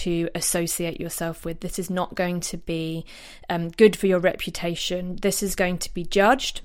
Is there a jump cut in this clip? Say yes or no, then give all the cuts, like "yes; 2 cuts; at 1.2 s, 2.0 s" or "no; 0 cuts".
no; 0 cuts